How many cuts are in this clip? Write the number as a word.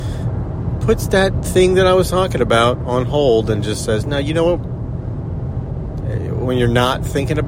one